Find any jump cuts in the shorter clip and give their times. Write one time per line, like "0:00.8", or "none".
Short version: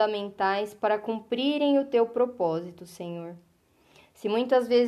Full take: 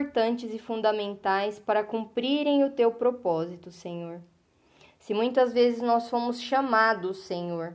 none